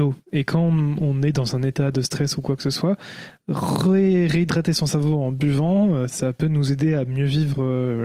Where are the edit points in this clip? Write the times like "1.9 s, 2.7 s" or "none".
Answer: none